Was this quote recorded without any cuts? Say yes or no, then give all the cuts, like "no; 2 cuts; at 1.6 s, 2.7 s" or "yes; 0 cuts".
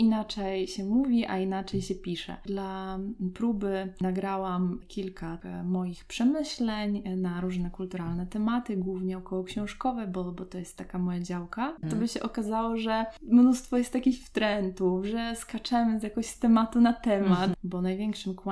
no; 2 cuts; at 11.8 s, 17.5 s